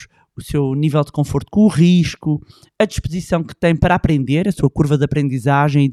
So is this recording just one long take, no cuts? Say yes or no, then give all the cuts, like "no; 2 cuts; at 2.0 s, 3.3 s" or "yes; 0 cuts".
no; 1 cut; at 3.8 s